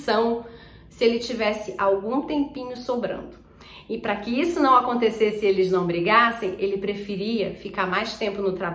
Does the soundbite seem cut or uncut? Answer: uncut